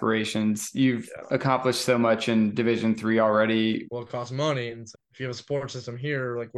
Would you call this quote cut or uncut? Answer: cut